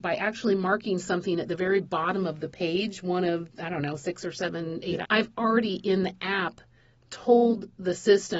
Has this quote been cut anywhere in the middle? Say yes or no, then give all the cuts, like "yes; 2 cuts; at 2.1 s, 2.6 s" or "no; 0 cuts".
yes; 1 cut; at 5.0 s